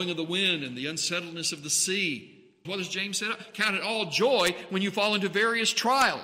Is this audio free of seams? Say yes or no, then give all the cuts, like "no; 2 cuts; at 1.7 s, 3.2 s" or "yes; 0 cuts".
no; 1 cut; at 2.6 s